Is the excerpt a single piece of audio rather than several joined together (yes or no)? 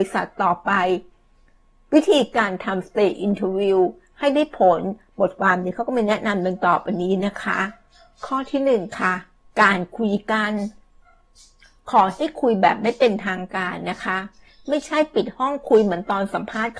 yes